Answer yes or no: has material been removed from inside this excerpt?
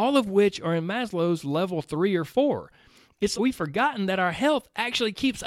yes